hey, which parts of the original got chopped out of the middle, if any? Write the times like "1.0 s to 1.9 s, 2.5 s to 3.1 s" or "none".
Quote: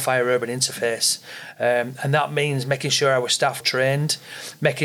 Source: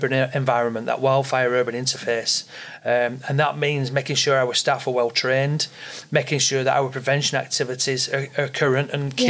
4.9 s to 5.1 s